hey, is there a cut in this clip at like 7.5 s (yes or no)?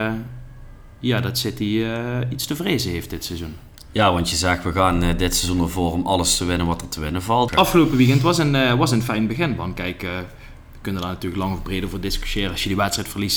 yes